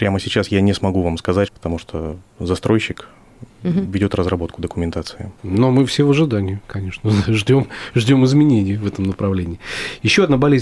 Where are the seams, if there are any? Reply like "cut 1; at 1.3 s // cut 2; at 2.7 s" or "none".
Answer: cut 1; at 1.5 s // cut 2; at 5.4 s